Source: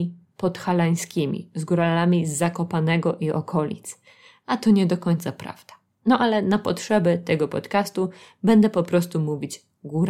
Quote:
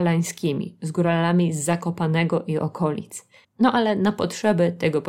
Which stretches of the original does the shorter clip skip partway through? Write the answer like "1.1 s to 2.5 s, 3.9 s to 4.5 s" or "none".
4.2 s to 5.9 s